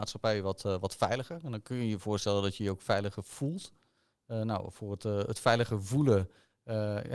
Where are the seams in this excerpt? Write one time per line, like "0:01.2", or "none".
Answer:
none